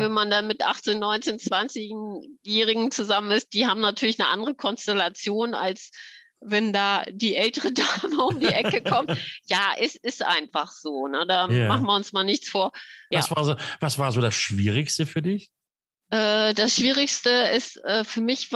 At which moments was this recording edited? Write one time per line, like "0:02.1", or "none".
0:13.1